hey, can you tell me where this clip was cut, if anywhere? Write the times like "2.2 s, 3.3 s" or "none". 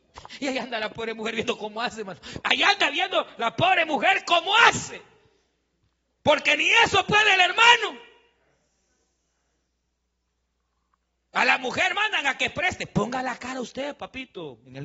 2.4 s